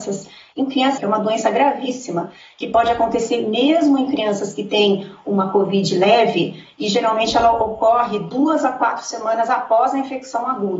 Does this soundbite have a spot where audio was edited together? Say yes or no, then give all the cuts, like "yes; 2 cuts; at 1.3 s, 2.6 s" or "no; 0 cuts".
yes; 1 cut; at 1.0 s